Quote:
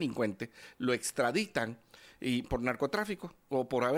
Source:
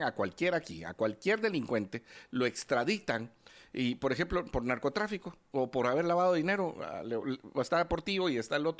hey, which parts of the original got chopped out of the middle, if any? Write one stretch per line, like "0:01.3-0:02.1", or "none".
0:04.0-0:04.5